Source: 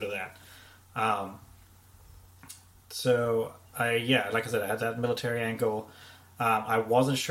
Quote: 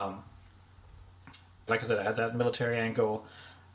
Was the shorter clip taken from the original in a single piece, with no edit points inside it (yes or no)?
no